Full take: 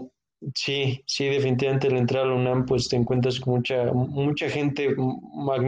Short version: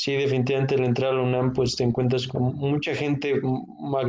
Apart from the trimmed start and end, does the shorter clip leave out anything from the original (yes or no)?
yes